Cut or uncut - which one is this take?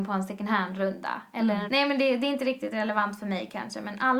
cut